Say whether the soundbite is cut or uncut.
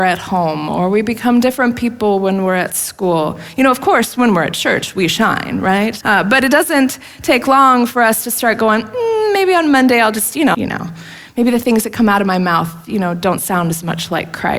cut